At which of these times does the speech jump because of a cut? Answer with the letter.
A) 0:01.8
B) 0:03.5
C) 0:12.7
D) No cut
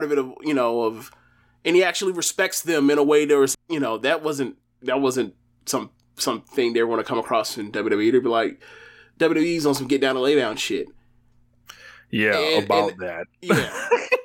B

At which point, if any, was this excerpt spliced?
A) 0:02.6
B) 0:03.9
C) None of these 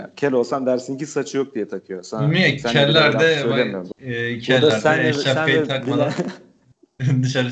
B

